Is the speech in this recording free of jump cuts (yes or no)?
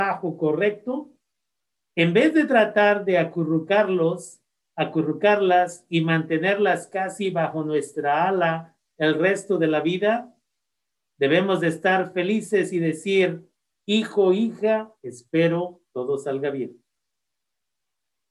yes